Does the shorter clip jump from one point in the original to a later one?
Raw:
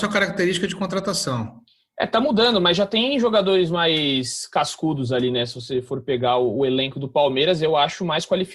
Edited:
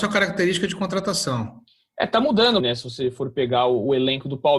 yes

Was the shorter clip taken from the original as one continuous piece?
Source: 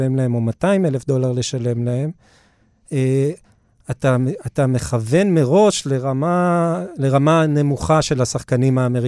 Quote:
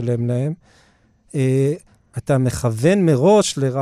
no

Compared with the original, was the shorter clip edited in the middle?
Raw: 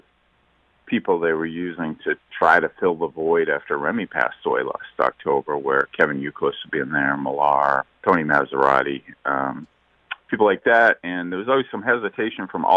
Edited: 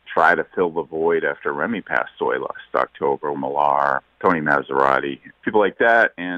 yes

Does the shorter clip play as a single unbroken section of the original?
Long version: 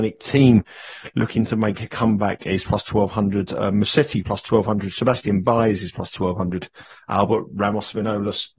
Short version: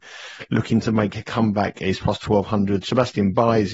no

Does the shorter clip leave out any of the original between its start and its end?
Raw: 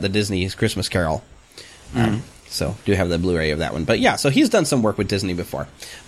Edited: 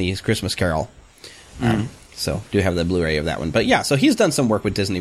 no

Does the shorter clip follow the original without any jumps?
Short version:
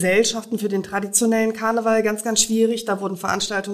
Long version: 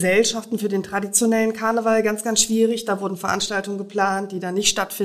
yes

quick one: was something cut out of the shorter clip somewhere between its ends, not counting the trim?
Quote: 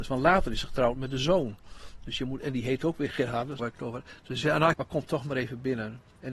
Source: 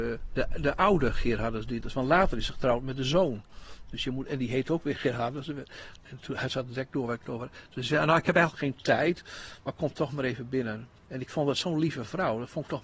yes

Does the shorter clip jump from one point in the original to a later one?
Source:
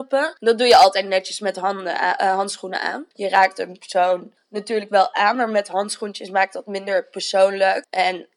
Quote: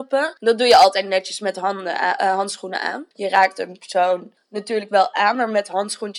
no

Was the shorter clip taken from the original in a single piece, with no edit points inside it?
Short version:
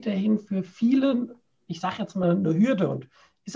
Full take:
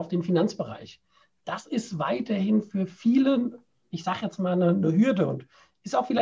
no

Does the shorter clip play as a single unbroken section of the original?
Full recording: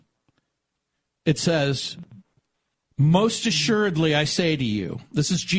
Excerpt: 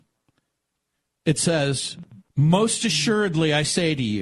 no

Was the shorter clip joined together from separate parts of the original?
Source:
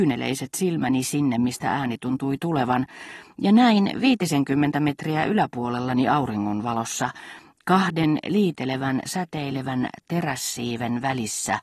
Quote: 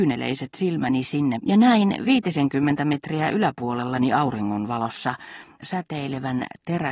yes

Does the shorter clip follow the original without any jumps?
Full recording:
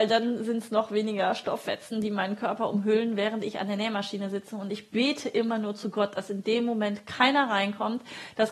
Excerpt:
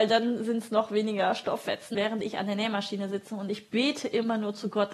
no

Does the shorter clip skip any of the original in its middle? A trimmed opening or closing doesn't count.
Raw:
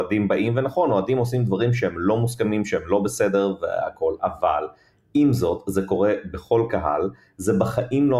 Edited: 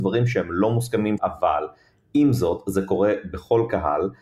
yes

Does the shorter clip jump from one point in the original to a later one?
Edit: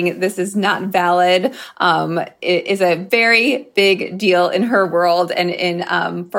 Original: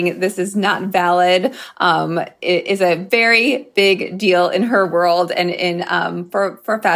no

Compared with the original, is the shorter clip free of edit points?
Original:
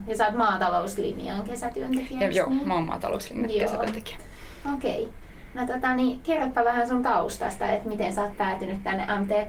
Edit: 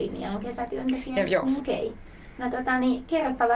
no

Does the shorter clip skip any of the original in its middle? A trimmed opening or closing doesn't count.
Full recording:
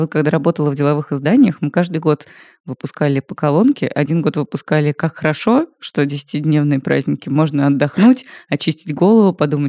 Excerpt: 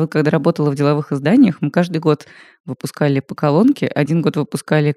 no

